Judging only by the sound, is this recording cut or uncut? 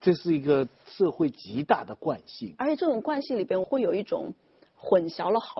cut